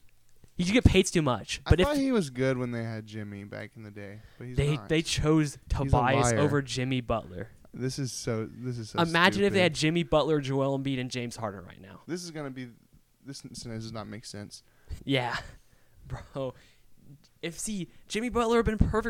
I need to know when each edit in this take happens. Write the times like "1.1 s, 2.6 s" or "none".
12.0 s, 15.0 s